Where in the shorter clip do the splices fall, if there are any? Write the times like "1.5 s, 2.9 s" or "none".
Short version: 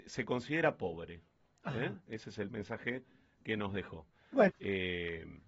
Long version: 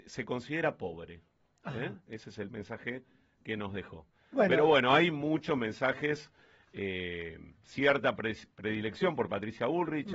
4.5 s